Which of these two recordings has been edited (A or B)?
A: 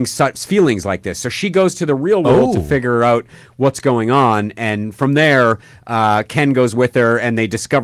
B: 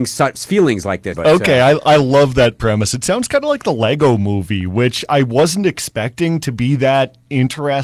B